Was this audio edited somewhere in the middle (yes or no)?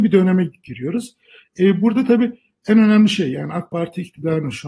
no